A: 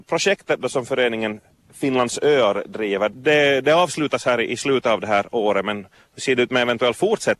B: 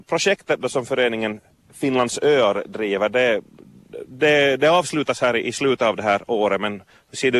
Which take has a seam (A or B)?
A